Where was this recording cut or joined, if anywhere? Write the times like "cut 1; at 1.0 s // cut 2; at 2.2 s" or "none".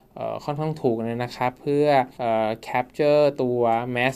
cut 1; at 2.1 s